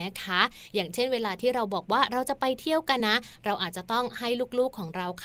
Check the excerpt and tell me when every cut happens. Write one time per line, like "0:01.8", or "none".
0:03.0